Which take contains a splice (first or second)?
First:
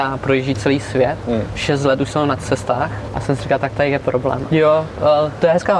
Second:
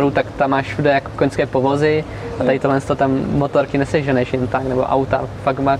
first